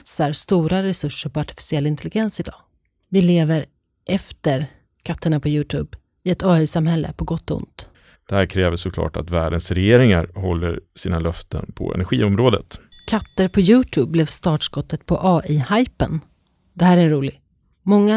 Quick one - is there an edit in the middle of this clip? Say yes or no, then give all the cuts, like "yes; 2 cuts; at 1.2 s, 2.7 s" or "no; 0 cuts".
yes; 2 cuts; at 8.2 s, 12.9 s